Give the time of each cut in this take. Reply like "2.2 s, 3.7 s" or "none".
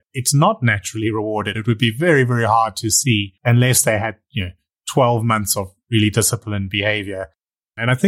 none